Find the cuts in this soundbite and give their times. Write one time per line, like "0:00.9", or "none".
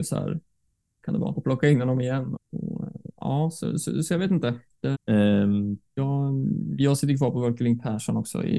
0:01.4
0:02.4
0:04.9